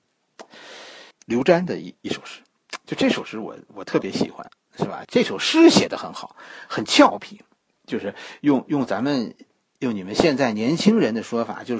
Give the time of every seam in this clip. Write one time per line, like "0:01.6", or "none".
0:01.1
0:05.0

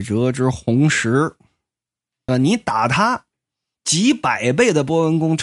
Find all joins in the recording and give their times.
0:02.3

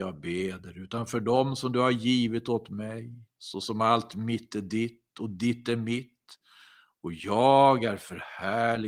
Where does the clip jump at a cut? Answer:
0:03.3

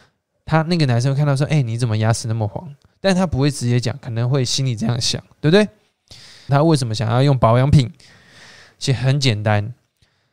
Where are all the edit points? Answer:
0:06.5

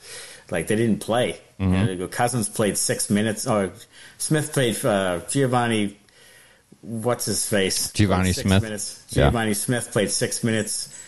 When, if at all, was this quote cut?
none

